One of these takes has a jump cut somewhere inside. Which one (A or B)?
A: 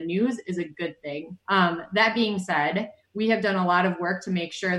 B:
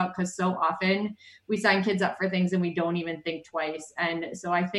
A